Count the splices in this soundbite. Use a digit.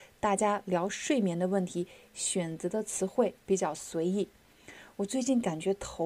0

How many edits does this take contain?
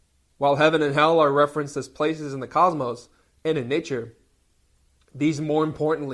0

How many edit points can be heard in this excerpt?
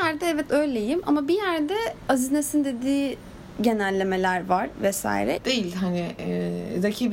1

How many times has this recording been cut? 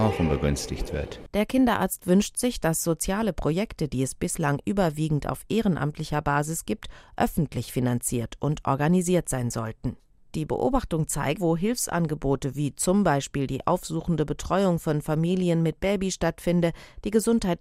1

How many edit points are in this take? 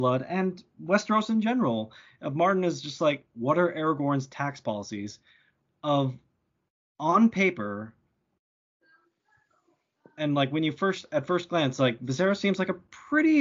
0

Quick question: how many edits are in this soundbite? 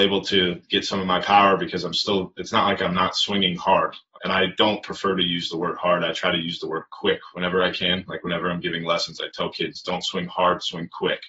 1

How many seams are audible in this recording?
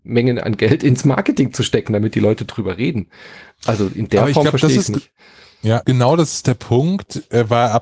1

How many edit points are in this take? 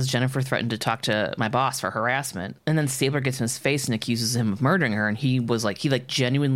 0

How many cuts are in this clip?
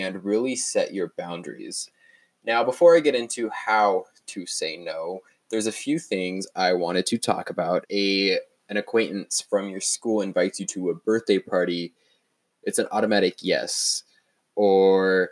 1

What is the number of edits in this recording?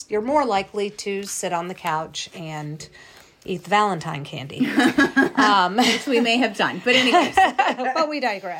1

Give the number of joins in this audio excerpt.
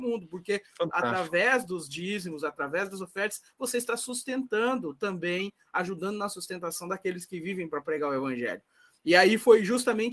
0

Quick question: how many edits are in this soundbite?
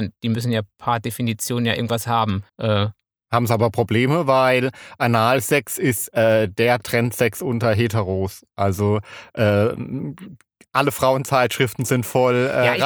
1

